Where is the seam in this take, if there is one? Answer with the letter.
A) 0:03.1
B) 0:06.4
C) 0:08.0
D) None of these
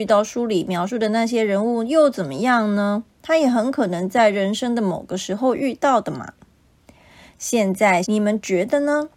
C